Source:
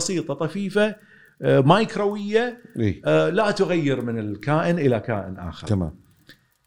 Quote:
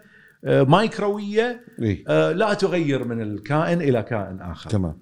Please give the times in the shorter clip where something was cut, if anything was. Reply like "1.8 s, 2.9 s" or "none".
none